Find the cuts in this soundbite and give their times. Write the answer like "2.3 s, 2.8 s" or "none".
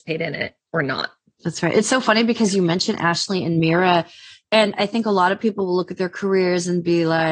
1.4 s